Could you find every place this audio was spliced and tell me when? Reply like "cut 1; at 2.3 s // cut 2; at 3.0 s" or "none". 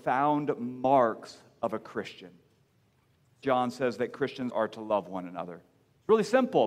cut 1; at 3.4 s // cut 2; at 4.5 s